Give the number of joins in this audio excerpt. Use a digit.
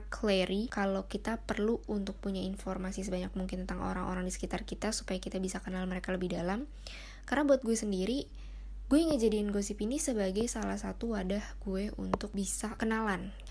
0